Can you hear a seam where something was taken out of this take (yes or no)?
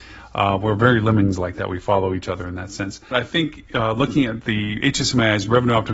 yes